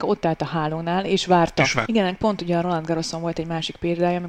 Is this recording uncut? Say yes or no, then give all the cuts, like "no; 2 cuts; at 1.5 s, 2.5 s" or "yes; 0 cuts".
no; 1 cut; at 1.9 s